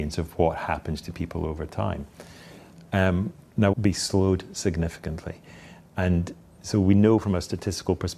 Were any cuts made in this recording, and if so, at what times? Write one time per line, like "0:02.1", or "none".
0:03.7